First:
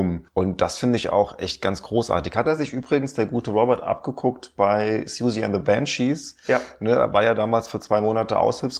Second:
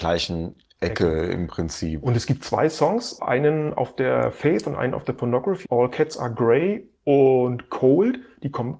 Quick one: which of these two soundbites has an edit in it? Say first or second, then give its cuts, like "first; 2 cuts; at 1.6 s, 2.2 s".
second; 1 cut; at 5.6 s